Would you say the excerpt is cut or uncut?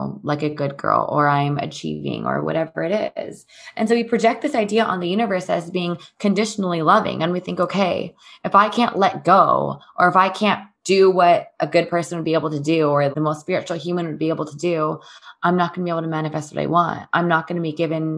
cut